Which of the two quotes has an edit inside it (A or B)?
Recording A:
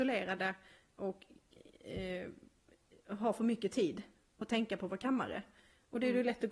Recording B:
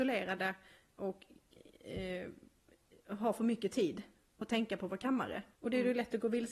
B